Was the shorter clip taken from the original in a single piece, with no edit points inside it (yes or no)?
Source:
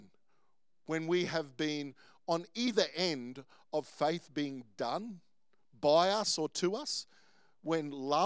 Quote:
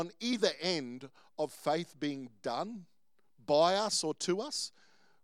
yes